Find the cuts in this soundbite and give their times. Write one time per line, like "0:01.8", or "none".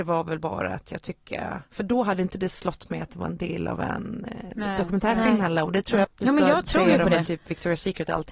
0:06.0